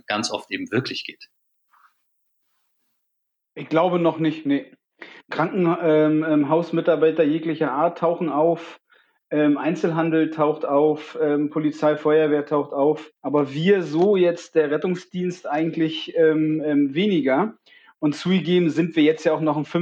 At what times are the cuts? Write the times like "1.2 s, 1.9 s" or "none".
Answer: 5.2 s, 13.2 s